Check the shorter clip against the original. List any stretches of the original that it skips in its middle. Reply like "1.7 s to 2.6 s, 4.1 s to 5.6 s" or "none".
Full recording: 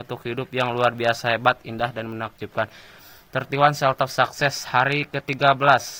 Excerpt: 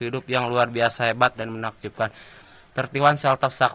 1.6 s to 1.9 s